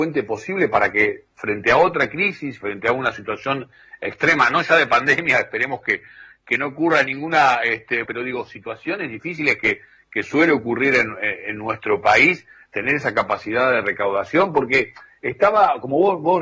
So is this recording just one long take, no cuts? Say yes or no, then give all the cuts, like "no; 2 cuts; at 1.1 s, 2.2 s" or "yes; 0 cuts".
no; 1 cut; at 8.0 s